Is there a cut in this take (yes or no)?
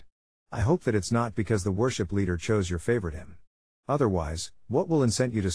yes